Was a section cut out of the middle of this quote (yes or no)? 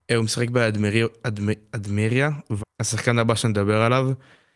yes